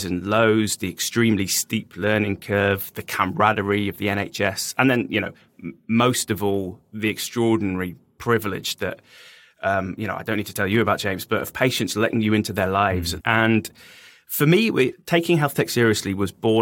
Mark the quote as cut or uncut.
cut